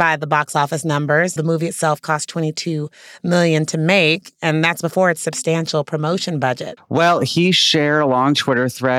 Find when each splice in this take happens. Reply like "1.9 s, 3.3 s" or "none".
1.4 s, 6.8 s

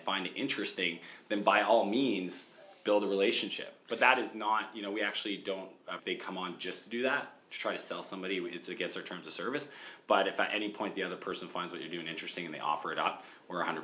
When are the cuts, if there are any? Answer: 6.0 s

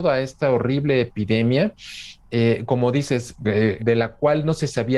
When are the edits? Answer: 3.8 s

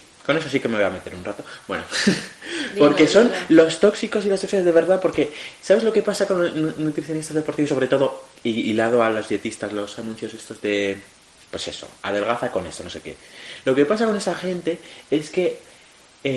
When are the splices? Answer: none

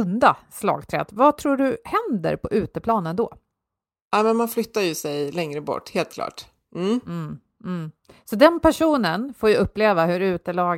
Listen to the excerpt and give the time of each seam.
none

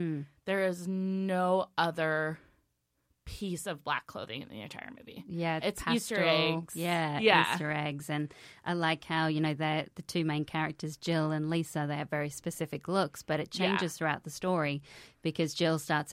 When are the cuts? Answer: 5.6 s

